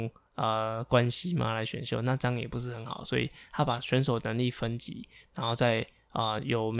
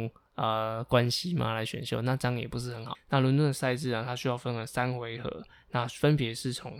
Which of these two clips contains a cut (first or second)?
second